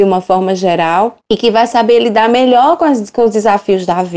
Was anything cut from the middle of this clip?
no; 0 cuts

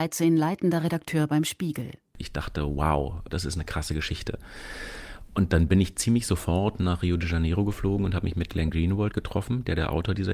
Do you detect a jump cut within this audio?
no; 0 cuts

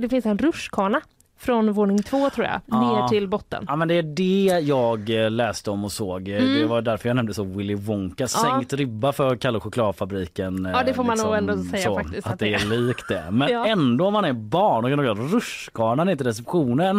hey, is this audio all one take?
yes; 0 cuts

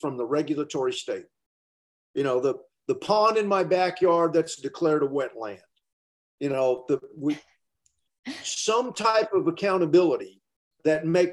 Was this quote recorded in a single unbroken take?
yes; 0 cuts

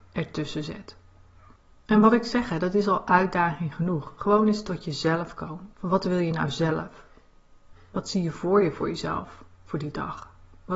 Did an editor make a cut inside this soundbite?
yes; 2 cuts; at 5.7 s, 7.7 s

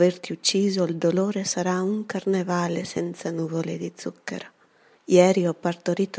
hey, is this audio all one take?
no; 1 cut; at 4.9 s

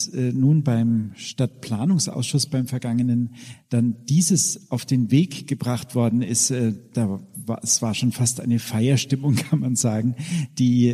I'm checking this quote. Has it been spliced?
no; 0 cuts

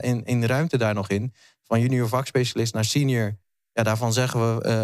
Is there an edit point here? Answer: no; 0 cuts

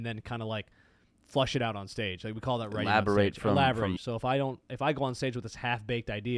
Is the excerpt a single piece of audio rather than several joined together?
no; 1 cut; at 4.0 s

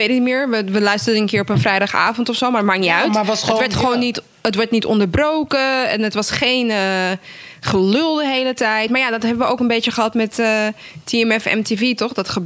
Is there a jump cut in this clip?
no; 0 cuts

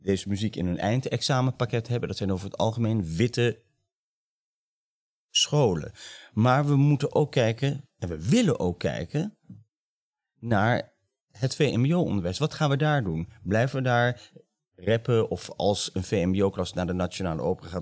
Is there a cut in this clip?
no; 0 cuts

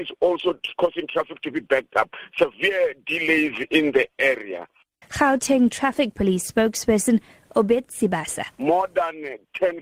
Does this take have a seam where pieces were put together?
yes; 1 cut; at 5.0 s

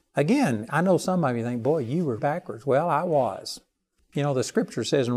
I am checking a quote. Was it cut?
yes; 1 cut; at 2.2 s

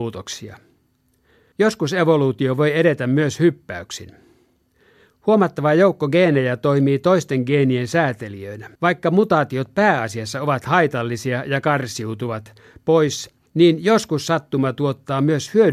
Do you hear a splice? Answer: yes; 3 cuts; at 1.5 s, 8.8 s, 13.5 s

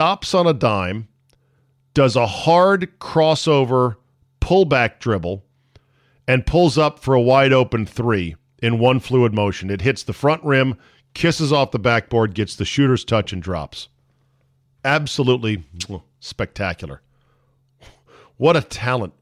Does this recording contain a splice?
no; 0 cuts

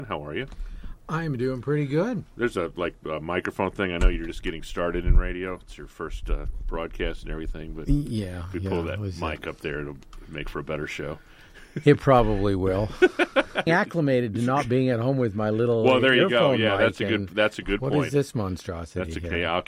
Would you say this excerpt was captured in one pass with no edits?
no; 1 cut; at 13.7 s

